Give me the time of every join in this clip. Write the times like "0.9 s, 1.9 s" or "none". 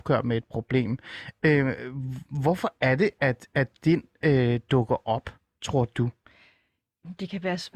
none